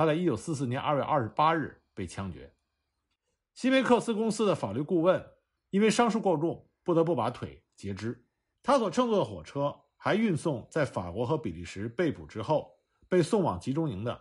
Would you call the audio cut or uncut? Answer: cut